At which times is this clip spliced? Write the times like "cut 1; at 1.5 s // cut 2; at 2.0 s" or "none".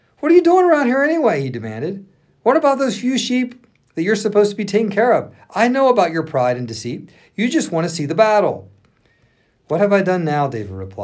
none